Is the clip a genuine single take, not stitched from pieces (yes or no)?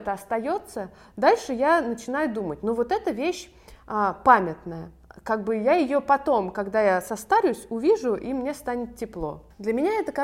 yes